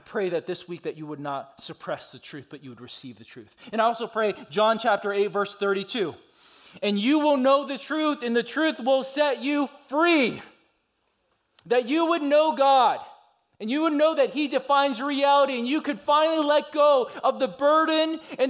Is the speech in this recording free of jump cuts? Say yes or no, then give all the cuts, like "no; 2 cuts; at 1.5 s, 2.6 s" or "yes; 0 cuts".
yes; 0 cuts